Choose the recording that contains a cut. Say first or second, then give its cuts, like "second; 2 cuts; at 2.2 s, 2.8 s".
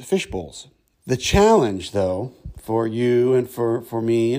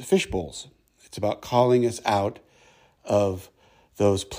first; 1 cut; at 0.9 s